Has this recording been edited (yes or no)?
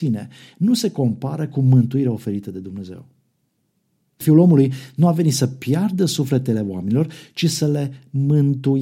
yes